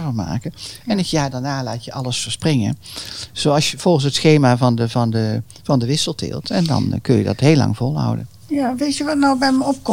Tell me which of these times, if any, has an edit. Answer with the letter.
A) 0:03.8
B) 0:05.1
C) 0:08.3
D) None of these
D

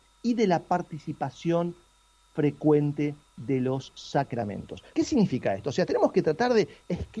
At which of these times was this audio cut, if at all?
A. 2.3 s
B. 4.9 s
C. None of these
B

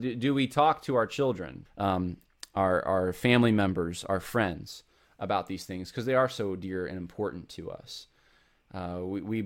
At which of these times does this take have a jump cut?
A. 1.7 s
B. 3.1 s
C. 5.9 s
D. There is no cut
A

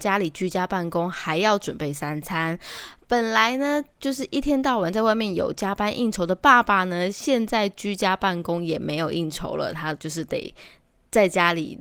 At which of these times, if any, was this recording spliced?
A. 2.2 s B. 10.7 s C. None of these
C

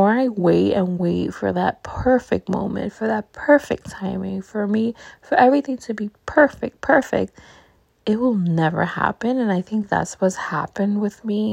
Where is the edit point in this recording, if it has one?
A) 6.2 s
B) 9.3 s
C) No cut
C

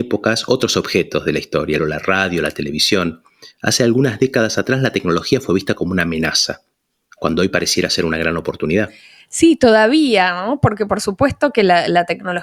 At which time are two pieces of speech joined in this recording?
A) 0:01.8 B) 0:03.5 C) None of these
A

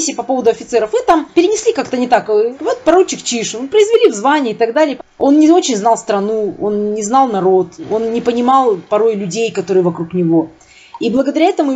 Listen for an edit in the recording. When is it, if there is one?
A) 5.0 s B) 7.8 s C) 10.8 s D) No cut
A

